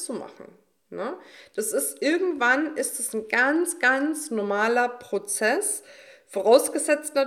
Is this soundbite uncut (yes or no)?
yes